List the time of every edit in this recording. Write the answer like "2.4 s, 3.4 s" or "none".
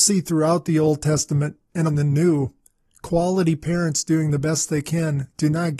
1.9 s